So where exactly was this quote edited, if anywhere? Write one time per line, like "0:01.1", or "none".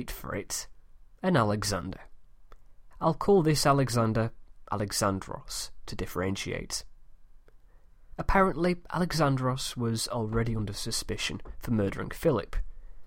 0:02.9